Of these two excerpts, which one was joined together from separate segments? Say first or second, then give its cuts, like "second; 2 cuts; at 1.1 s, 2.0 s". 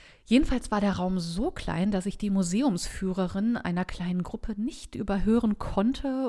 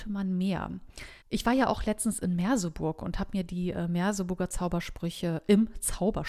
second; 1 cut; at 1.2 s